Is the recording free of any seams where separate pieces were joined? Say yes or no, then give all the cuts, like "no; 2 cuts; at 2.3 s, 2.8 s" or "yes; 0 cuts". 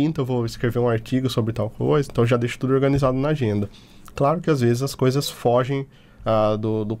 yes; 0 cuts